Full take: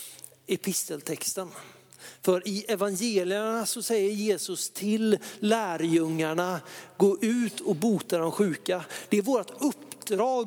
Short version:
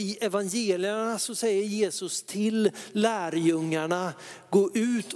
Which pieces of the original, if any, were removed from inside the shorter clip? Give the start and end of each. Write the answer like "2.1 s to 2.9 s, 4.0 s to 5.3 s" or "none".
none